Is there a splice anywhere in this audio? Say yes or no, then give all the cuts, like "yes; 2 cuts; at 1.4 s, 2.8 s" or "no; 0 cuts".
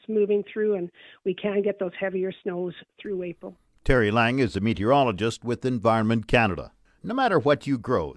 yes; 1 cut; at 7.0 s